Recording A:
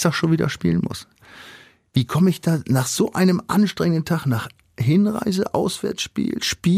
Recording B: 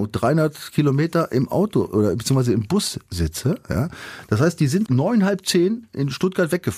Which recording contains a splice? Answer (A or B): B